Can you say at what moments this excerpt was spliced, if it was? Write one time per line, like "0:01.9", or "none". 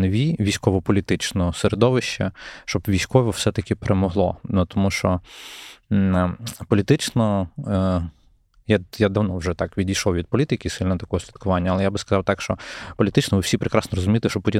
none